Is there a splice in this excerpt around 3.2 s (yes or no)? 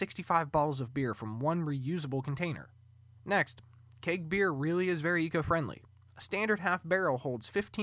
yes